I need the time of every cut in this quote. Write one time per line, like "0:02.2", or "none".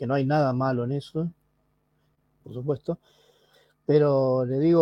0:02.4